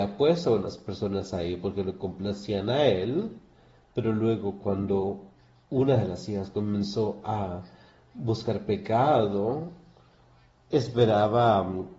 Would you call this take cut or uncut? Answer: uncut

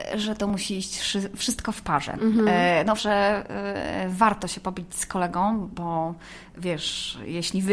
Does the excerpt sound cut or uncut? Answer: cut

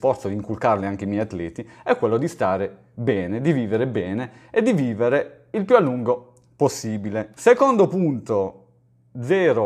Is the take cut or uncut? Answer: cut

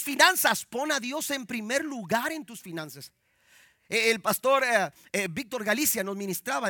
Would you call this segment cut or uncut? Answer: uncut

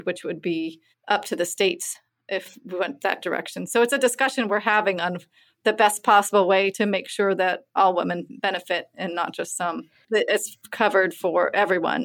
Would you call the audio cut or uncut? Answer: cut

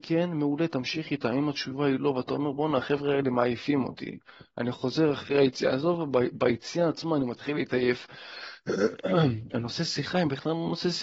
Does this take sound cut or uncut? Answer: uncut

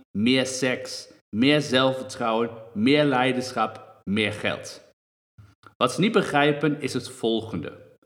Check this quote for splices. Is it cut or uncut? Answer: uncut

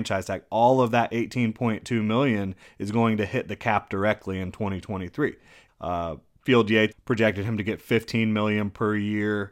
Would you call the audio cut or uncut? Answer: cut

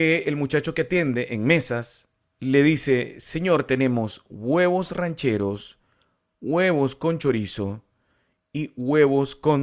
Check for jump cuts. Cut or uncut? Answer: uncut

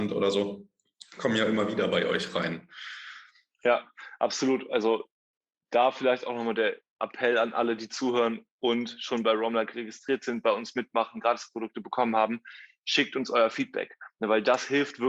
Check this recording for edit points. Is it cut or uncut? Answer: uncut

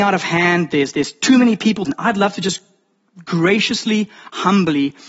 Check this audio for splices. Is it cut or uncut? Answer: cut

